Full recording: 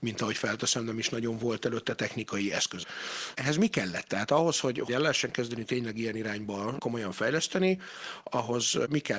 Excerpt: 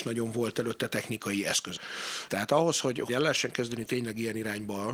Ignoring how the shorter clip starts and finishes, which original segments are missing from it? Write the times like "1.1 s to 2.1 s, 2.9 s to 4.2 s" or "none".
3.3 s to 4.1 s